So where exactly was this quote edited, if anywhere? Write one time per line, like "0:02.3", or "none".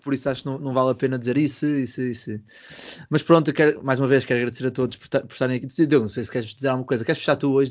none